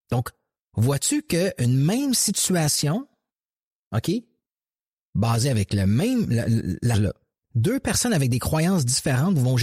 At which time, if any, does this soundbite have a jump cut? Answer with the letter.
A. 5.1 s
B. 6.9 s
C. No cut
B